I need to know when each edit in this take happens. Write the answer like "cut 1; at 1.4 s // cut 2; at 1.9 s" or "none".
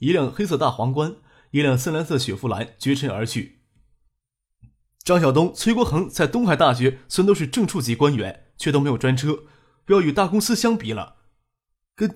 none